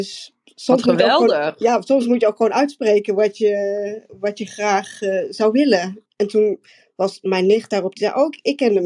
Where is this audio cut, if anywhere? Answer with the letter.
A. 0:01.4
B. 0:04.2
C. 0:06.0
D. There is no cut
C